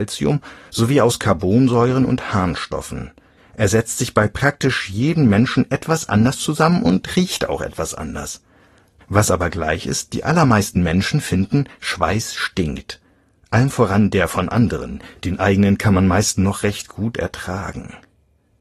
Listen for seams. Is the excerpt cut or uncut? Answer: cut